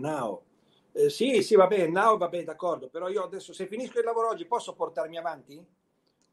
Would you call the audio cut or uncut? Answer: uncut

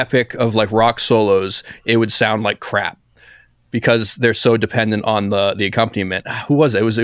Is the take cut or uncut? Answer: uncut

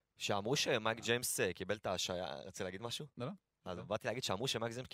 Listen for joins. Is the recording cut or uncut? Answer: uncut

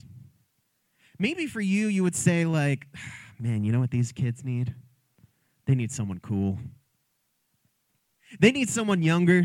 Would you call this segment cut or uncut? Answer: uncut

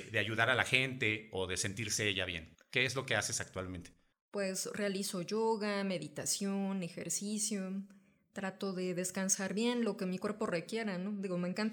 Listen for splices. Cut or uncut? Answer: uncut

